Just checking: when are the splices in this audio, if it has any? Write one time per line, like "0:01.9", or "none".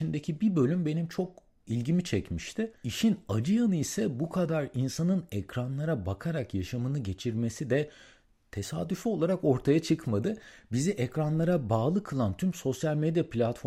0:02.8